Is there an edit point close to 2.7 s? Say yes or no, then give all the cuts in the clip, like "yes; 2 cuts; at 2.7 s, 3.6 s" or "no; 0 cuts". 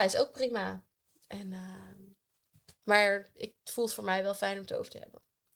no; 0 cuts